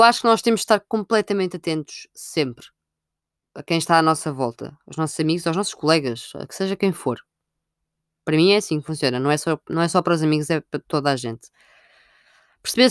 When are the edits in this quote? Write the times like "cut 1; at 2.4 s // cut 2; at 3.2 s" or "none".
none